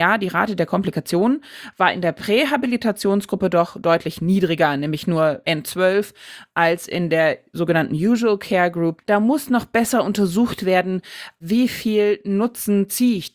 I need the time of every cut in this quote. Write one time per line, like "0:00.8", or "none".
0:09.0

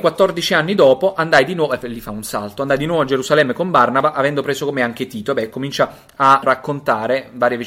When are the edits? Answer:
0:06.4

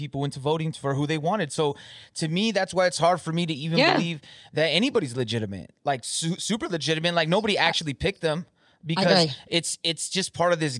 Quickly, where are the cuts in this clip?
none

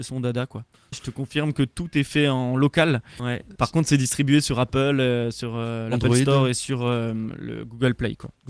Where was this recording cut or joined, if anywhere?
0:00.9
0:03.2

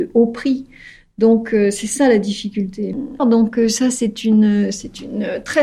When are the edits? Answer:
0:03.2

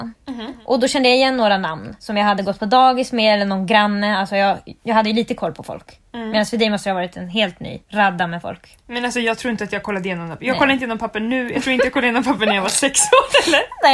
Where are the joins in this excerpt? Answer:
0:07.8

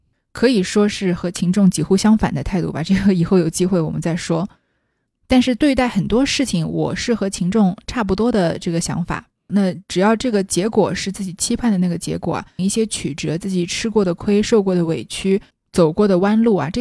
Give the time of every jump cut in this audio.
0:09.5
0:12.6
0:15.5

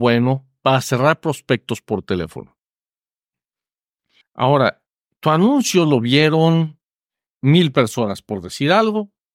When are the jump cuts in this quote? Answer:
0:04.2

